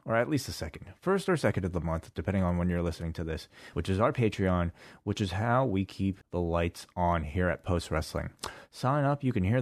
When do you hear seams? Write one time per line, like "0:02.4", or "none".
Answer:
0:03.7
0:06.2
0:08.7